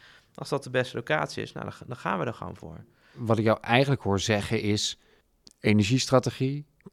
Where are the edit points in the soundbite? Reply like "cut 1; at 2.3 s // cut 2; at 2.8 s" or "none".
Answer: none